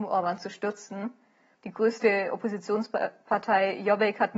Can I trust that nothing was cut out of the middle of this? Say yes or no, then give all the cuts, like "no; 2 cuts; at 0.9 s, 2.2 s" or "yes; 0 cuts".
no; 1 cut; at 1.5 s